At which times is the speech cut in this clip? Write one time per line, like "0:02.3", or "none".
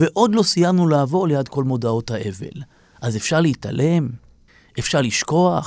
none